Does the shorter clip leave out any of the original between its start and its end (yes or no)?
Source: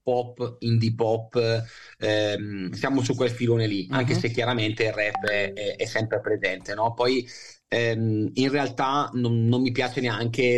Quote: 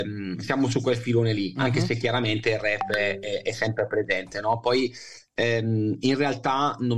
no